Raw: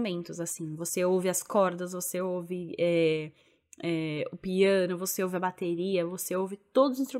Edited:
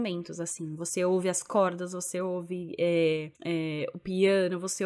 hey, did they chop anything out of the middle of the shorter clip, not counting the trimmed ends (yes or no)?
yes